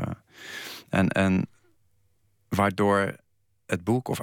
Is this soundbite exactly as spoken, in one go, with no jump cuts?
yes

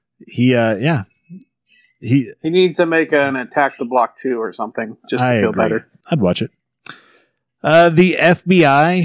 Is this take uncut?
no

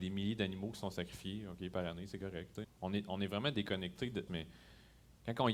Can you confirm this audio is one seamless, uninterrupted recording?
no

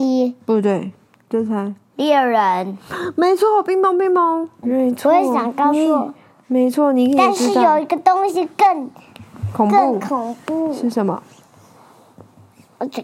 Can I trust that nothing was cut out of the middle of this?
no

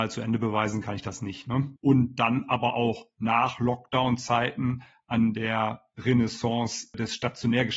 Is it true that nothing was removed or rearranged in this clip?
no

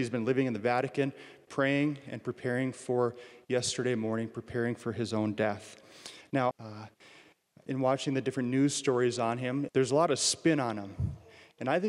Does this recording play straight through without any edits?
no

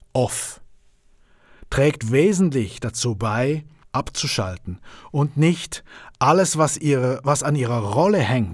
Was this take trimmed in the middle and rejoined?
yes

